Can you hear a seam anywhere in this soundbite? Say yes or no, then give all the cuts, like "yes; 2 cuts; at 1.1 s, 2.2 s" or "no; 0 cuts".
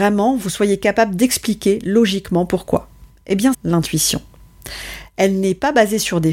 yes; 1 cut; at 3.5 s